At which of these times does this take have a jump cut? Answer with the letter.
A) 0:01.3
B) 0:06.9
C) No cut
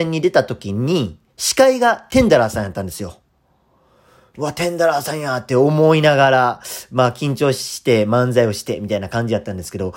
A